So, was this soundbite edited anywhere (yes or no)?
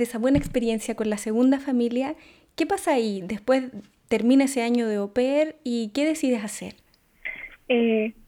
no